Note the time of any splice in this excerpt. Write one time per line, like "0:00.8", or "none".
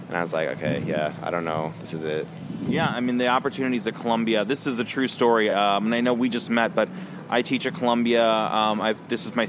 none